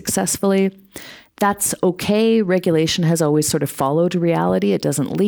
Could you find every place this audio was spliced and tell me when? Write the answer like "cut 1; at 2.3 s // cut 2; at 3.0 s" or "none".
none

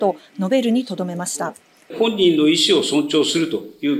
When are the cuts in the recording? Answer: cut 1; at 1.9 s

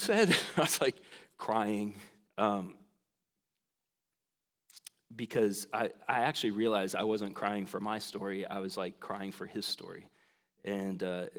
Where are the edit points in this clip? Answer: cut 1; at 2.3 s

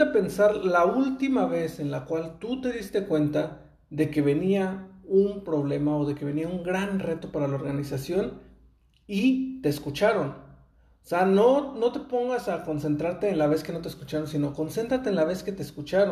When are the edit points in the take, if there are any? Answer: none

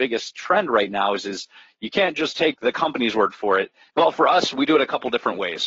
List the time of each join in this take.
cut 1; at 3.9 s

